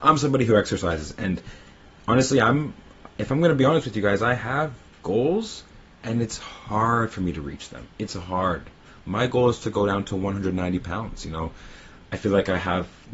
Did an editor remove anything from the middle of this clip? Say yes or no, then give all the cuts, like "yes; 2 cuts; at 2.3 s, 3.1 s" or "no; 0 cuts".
no; 0 cuts